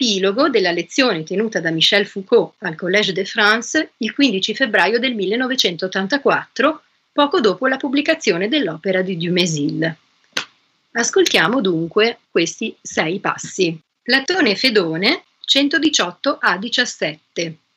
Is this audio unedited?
no; 2 cuts; at 12.2 s, 15.4 s

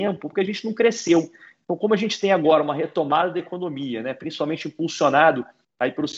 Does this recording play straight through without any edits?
yes; 0 cuts

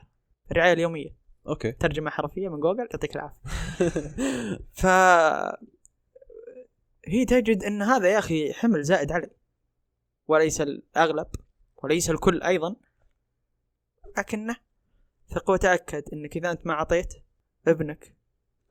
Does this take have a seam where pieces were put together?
no; 0 cuts

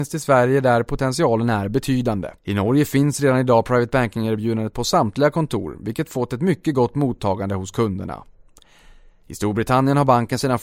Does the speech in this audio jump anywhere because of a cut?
yes; 1 cut; at 2.4 s

